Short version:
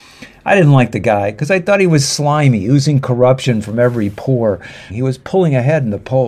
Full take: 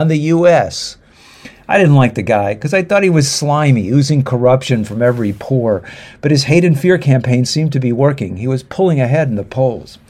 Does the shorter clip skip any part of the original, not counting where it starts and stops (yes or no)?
yes